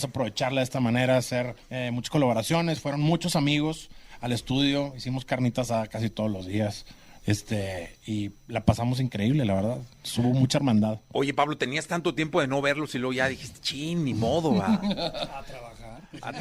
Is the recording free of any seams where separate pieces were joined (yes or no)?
no